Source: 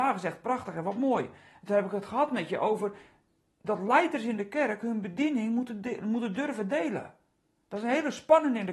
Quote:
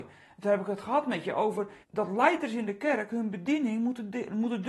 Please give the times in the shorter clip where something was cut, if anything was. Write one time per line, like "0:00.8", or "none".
0:01.8